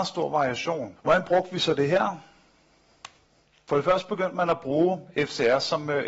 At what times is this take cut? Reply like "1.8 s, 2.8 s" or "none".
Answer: 1.0 s

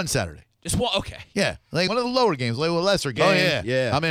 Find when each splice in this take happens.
1.9 s, 3.2 s

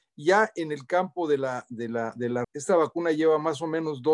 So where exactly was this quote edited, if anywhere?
2.4 s

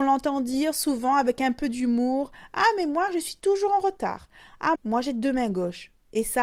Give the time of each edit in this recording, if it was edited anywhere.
4.7 s

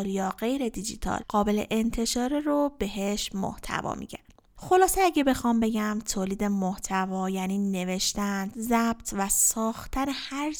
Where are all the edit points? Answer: 8.5 s

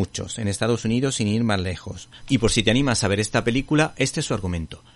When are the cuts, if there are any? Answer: 2.2 s

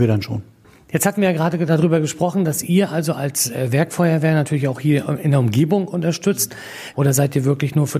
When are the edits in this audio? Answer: 6.9 s

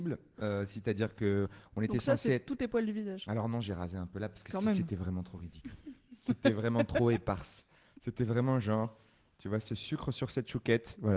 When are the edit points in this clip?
none

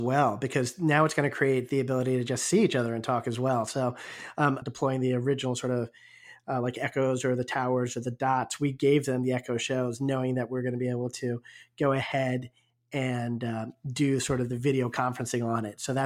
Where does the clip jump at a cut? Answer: 4.6 s

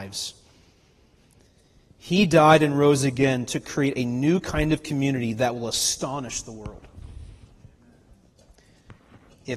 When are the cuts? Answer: none

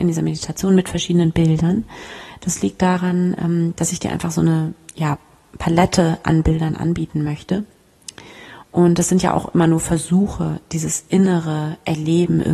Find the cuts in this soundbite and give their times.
none

